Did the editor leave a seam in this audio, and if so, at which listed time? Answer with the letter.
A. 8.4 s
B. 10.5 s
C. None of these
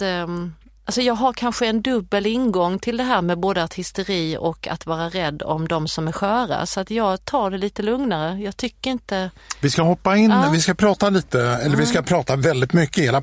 C